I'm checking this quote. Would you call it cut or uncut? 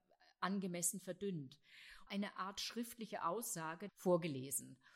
cut